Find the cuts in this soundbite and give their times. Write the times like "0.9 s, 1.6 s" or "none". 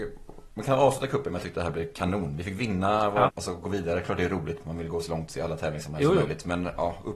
3.3 s